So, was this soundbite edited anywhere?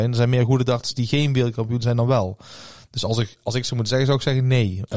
no; 0 cuts

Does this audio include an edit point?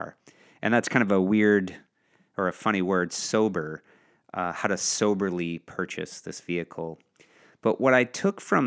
no; 0 cuts

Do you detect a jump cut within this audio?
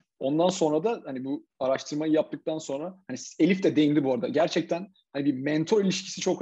yes; 1 cut; at 1.5 s

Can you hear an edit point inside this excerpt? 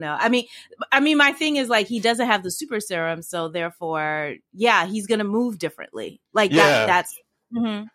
no; 0 cuts

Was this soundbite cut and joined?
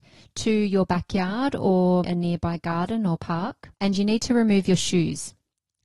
yes; 2 cuts; at 2.0 s, 3.7 s

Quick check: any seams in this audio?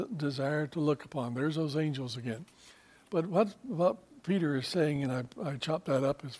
no; 0 cuts

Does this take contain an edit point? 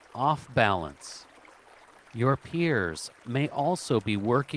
no; 0 cuts

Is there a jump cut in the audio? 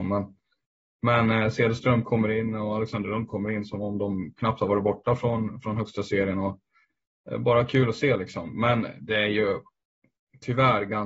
no; 0 cuts

